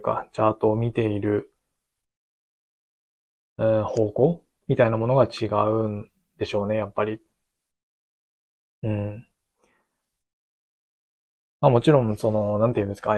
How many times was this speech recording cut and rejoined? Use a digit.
0